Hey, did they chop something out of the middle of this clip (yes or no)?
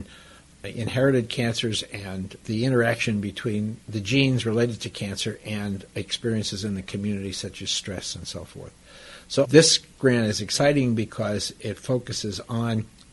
yes